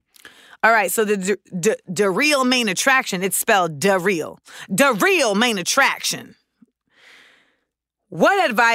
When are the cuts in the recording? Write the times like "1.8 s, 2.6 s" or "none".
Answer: none